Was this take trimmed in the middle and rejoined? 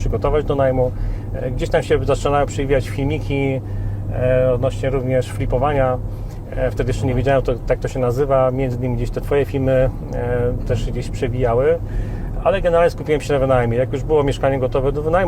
no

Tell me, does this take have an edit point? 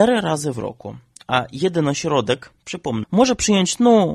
yes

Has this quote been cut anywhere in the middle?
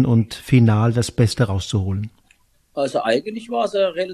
no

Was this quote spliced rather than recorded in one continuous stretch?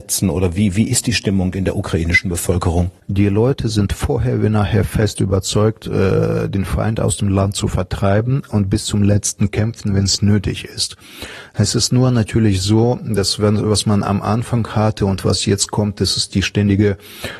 yes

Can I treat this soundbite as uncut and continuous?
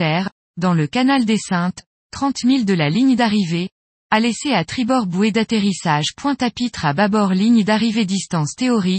yes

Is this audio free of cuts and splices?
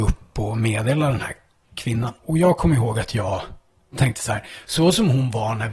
yes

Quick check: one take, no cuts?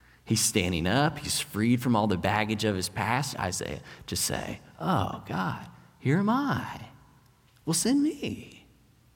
no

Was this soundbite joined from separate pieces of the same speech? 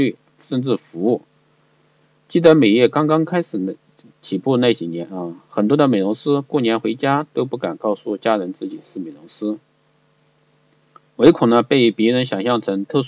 no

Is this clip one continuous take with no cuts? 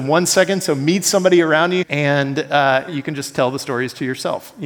no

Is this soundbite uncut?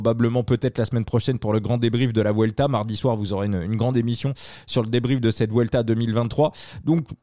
yes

